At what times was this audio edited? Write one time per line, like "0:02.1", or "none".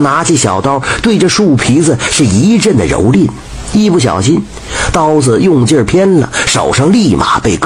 none